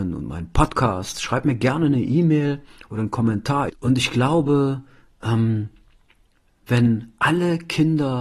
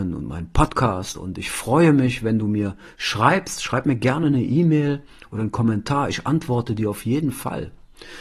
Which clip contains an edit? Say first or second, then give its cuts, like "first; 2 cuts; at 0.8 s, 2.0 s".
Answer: first; 2 cuts; at 1.1 s, 3.7 s